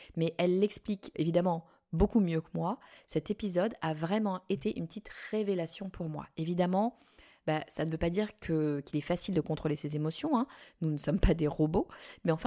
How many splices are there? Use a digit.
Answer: 1